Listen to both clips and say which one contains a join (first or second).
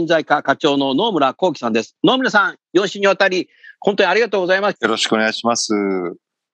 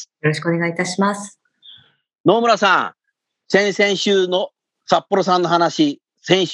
first